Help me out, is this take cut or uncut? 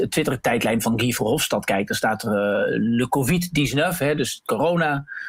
uncut